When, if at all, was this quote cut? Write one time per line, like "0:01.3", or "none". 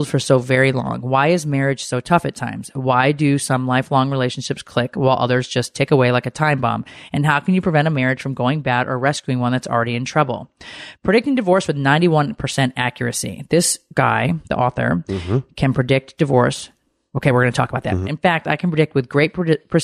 0:18.0

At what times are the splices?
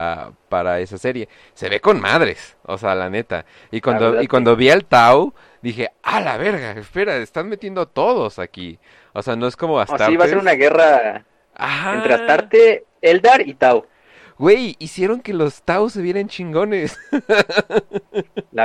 none

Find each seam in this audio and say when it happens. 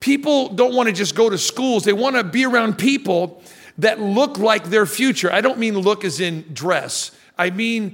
none

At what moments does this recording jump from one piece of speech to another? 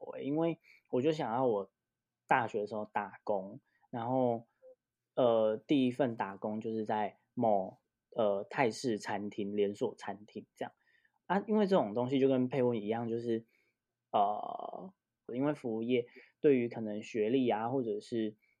0:15.3

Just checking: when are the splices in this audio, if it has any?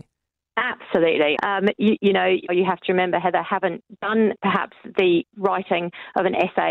0:01.3
0:02.5

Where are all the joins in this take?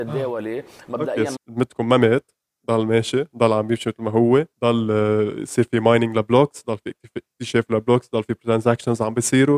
0:01.4
0:04.5

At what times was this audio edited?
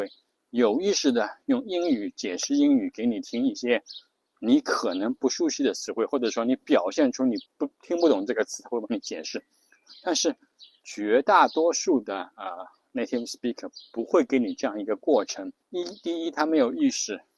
0:07.5
0:15.6

